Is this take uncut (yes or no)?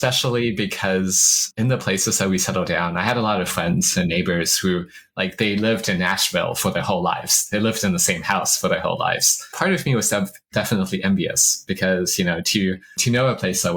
yes